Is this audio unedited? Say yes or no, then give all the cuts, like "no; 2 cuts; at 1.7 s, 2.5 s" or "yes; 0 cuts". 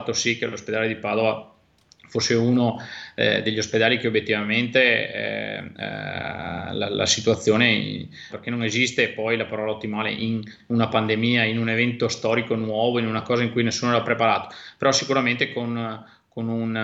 no; 2 cuts; at 5.7 s, 8.3 s